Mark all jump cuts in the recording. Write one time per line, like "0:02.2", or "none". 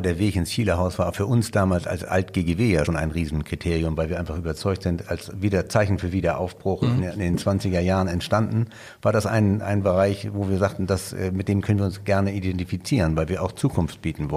0:02.9